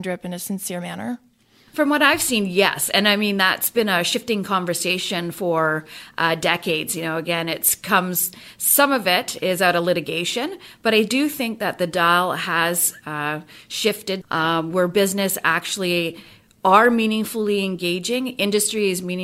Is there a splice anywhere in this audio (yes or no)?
yes